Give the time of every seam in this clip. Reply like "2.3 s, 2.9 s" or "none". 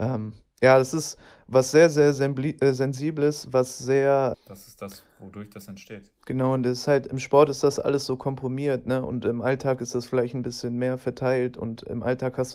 4.3 s